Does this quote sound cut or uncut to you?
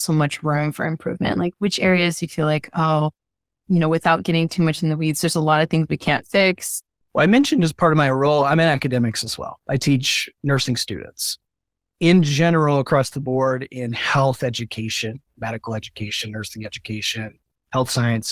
cut